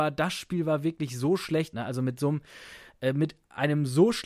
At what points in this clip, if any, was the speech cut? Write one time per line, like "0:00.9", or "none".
0:01.7